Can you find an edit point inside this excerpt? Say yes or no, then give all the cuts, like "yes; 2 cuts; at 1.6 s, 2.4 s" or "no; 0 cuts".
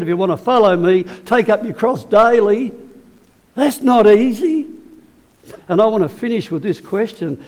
yes; 1 cut; at 5.5 s